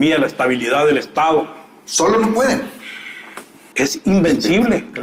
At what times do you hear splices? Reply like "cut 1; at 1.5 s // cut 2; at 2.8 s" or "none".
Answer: cut 1; at 3.7 s